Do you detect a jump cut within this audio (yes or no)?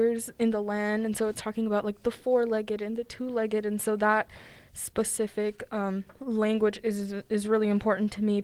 no